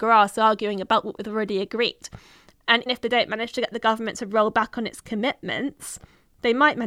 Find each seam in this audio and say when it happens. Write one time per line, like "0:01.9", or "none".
0:02.9

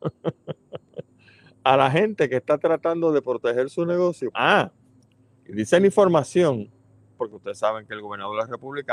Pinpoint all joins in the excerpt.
0:04.3
0:07.2

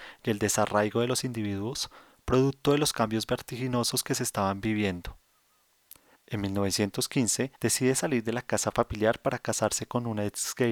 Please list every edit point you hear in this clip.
0:06.1
0:07.5

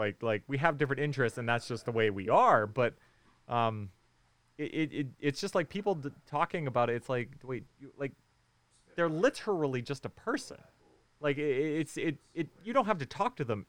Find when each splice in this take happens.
0:07.7

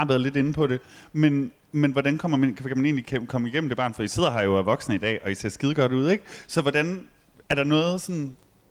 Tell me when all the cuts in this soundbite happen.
none

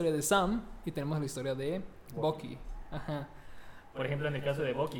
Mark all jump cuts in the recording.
0:03.9

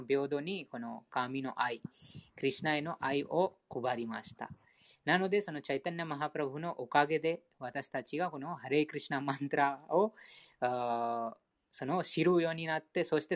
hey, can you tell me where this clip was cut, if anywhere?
none

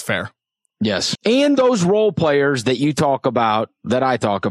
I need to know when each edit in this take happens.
0:01.2

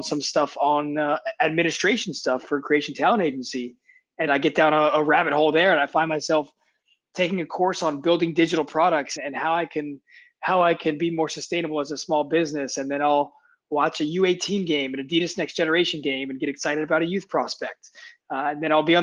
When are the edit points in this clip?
0:04.3
0:09.2

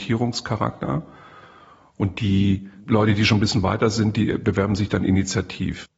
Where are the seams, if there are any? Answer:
none

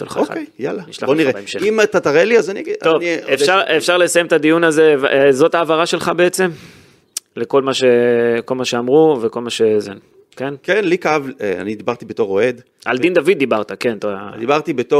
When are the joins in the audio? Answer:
none

